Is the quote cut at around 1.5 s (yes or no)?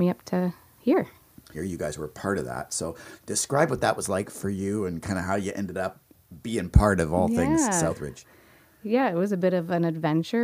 yes